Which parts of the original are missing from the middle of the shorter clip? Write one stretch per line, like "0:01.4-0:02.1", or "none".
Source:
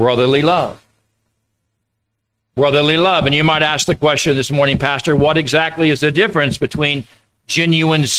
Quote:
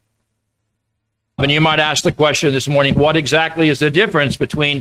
0:02.4-0:03.2
0:04.8-0:05.2